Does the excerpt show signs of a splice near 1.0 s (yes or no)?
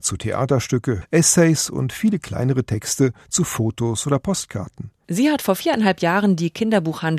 yes